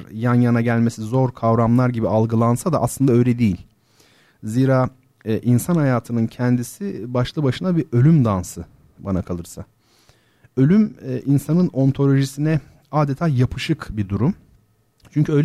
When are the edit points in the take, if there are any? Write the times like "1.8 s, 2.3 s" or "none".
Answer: none